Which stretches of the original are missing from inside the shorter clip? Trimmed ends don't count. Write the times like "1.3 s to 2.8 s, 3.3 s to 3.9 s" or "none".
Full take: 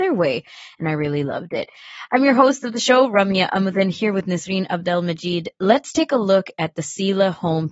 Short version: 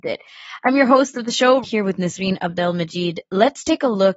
3.1 s to 3.9 s

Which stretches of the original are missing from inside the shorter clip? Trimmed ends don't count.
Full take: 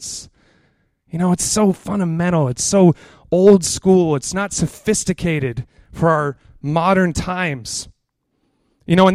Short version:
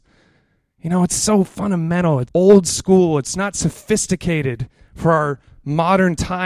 2.6 s to 3.2 s

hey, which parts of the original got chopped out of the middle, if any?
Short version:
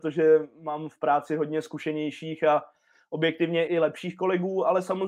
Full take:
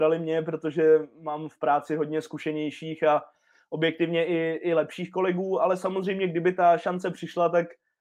4.3 s to 4.6 s

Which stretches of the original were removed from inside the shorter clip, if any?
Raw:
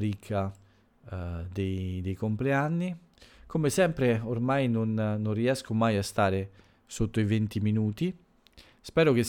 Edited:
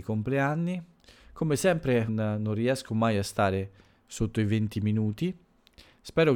4.2 s to 4.9 s

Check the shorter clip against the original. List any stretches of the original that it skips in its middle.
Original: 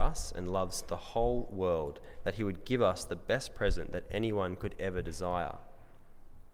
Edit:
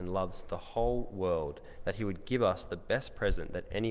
none

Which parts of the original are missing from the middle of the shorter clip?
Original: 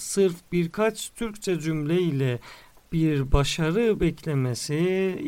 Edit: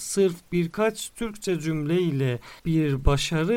2.6 s to 2.9 s

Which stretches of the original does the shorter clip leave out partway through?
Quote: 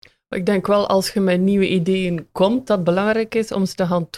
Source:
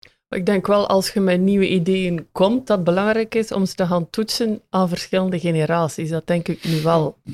none

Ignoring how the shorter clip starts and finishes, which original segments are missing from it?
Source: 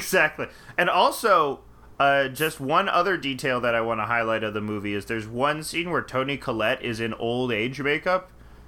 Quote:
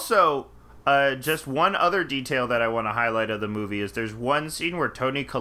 none

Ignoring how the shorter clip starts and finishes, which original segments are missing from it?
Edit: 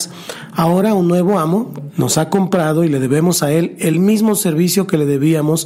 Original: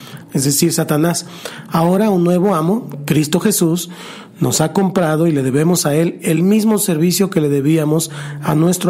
3.0 s to 4.3 s

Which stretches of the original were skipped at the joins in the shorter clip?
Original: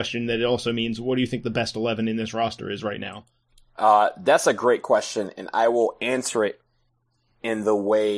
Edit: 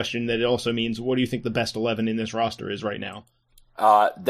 none

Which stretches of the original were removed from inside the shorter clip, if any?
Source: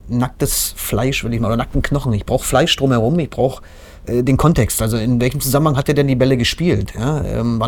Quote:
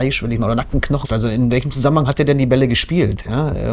2.1 s to 4.7 s

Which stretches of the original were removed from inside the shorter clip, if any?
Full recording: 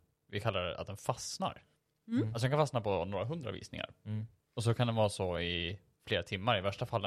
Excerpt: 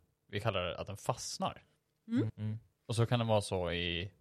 2.3 s to 4.0 s

